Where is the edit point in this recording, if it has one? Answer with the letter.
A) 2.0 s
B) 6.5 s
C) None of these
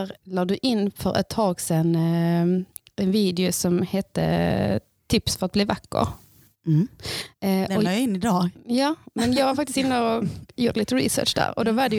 C